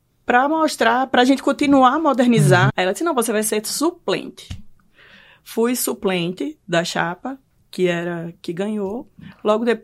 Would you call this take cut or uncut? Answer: cut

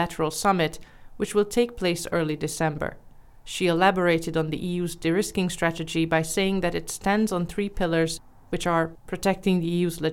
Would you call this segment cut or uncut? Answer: uncut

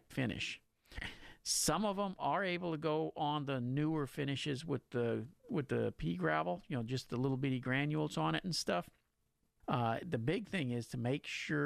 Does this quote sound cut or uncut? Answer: cut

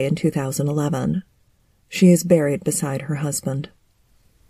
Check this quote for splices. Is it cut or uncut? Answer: uncut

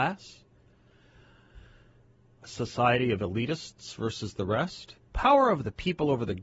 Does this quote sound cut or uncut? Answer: cut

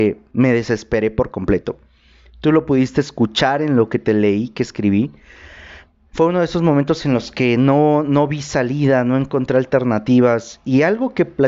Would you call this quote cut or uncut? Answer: uncut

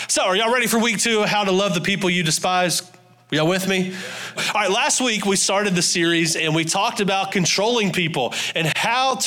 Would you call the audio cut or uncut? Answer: cut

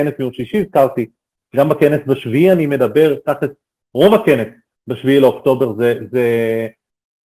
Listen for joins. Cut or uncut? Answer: uncut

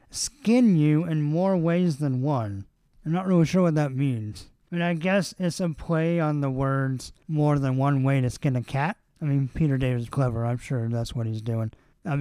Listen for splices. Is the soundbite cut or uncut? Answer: cut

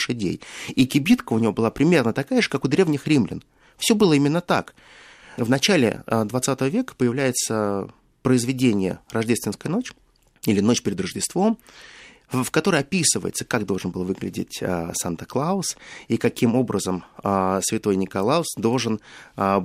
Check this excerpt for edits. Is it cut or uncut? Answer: uncut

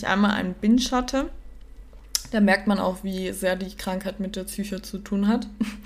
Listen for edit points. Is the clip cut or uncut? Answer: uncut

